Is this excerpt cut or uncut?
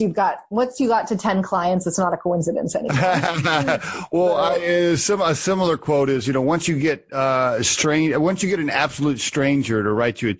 uncut